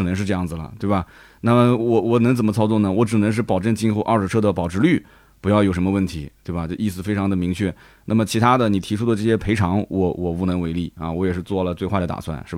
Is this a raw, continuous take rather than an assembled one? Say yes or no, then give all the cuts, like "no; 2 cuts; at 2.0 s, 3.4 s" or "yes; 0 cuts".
yes; 0 cuts